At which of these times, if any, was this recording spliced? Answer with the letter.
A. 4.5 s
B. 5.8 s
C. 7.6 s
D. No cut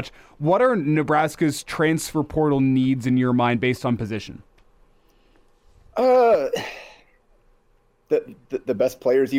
D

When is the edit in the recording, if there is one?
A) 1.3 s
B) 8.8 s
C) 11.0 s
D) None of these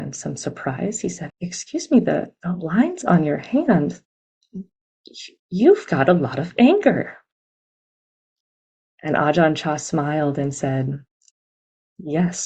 A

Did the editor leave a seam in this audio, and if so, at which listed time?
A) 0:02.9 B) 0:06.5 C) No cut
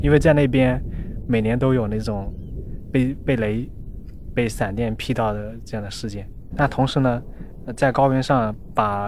B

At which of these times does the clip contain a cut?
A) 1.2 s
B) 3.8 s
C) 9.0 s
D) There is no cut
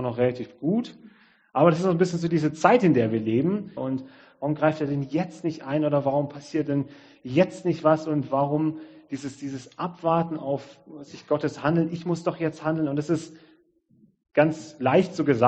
B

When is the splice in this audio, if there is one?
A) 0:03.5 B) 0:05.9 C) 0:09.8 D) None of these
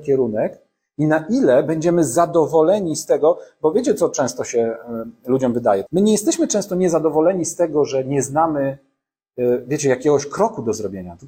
B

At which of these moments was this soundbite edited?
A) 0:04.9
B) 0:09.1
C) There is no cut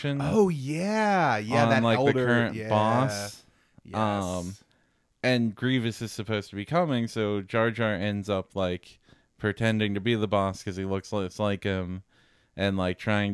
C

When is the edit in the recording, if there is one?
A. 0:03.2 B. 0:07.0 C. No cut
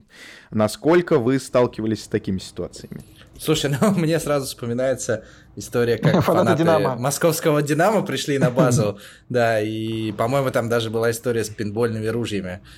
C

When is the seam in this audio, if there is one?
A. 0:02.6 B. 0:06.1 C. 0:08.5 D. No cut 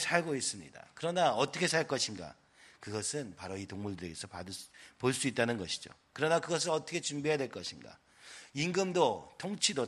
B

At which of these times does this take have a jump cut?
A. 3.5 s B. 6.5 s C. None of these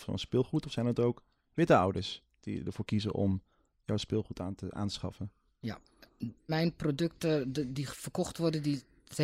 B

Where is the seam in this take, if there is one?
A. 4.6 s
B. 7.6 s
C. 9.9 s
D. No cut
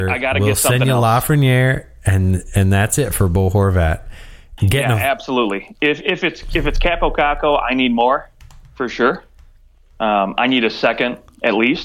A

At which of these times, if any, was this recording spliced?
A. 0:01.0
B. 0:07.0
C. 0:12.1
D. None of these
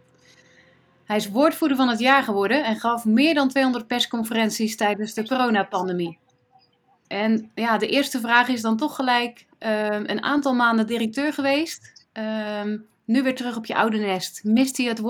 B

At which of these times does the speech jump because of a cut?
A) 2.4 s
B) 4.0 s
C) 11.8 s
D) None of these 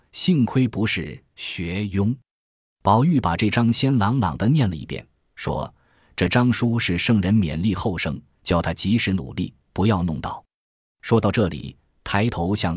A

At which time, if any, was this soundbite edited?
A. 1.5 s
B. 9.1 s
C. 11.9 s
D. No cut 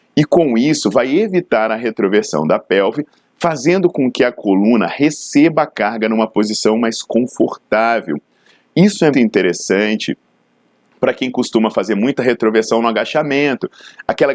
B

